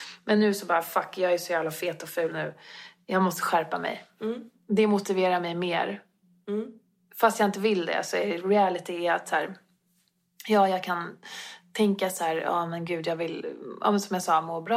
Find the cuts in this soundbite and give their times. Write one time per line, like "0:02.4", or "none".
none